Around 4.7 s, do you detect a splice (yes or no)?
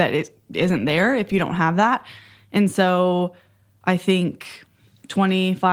no